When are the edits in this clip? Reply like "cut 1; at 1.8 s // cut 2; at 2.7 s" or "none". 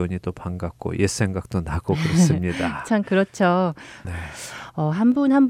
cut 1; at 4.0 s